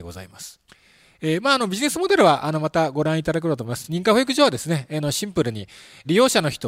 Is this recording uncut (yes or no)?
yes